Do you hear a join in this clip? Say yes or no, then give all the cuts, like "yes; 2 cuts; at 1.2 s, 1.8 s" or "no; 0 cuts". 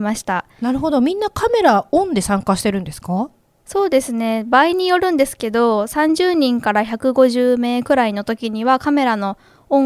no; 0 cuts